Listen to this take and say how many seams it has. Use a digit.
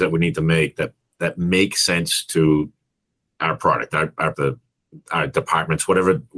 1